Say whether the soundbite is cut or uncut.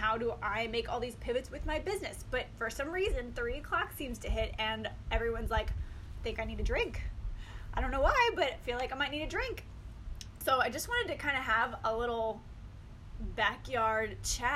uncut